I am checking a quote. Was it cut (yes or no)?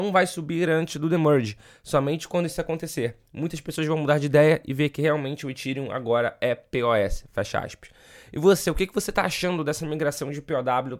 no